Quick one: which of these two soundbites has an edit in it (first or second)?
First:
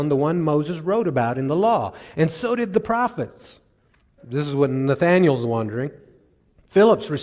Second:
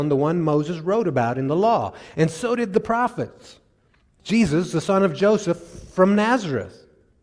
first